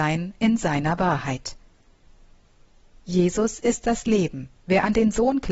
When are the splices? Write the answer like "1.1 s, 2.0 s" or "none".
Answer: 4.6 s